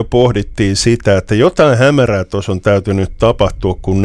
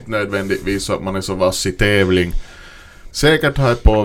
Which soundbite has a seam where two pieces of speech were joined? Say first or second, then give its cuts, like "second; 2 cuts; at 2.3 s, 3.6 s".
second; 1 cut; at 3.1 s